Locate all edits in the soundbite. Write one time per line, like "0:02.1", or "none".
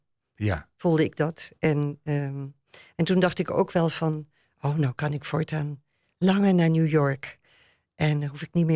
none